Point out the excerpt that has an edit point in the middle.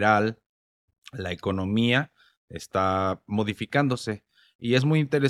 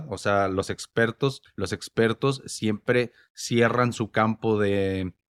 second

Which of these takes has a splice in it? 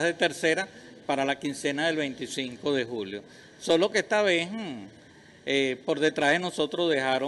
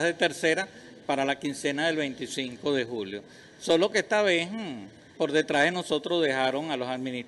second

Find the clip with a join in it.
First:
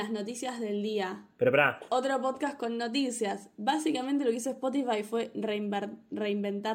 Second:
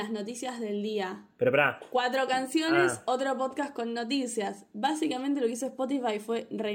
first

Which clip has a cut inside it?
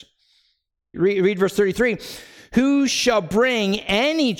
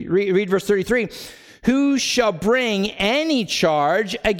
first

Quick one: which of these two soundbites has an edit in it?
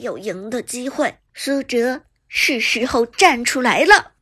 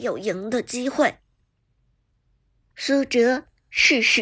first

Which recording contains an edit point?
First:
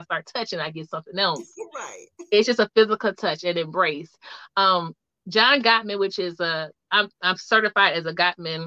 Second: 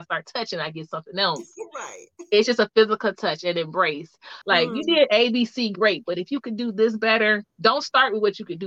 second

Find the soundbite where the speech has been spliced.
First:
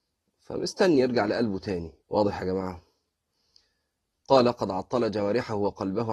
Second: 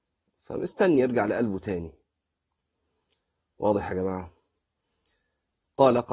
first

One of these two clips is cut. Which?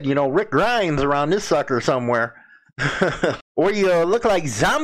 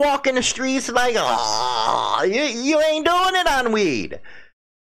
first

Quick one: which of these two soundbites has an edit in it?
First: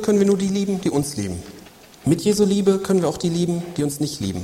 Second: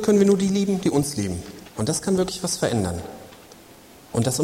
second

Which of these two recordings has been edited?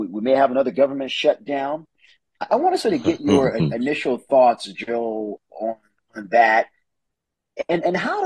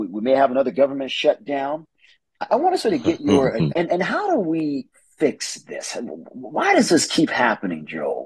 second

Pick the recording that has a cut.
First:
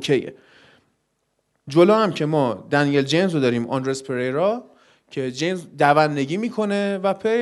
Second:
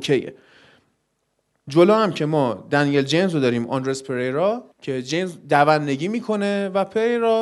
second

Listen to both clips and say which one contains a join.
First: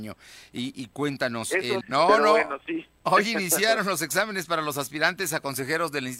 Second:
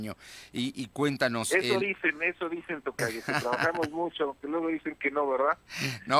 first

